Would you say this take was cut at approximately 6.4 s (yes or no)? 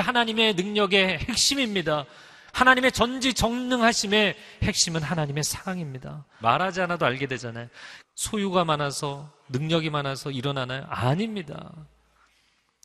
yes